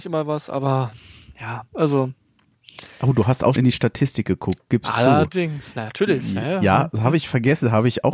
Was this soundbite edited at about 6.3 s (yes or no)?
no